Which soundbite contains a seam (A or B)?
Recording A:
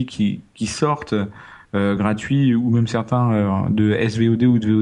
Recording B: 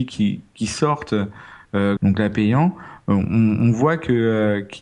B